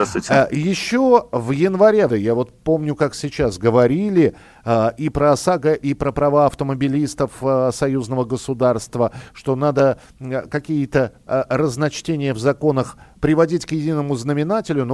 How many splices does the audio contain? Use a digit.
1